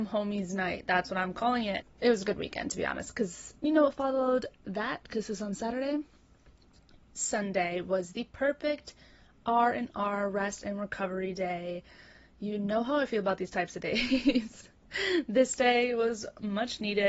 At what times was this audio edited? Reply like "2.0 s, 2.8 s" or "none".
1.8 s, 3.6 s